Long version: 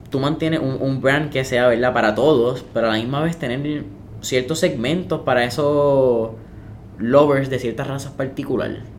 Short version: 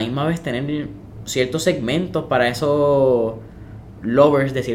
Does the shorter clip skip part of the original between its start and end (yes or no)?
no